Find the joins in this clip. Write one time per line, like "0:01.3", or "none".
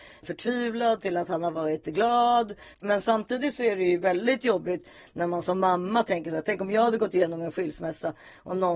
0:02.7

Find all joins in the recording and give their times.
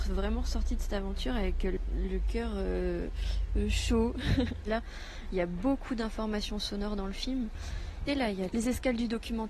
0:04.7
0:08.1

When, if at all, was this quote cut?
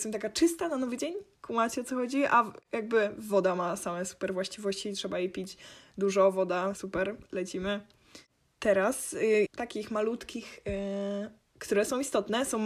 0:06.7
0:09.5

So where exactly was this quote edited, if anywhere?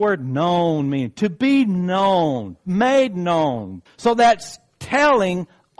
0:03.9

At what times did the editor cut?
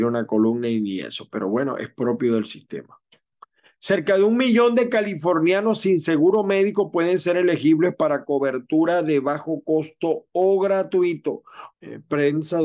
0:11.7

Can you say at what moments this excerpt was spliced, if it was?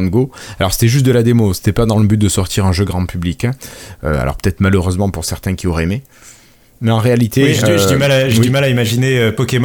none

